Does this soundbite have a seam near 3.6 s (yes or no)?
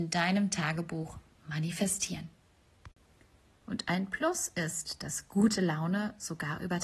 yes